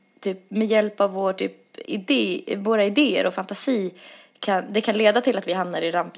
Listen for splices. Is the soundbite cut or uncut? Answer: uncut